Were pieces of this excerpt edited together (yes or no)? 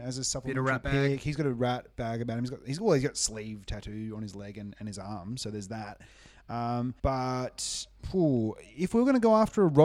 yes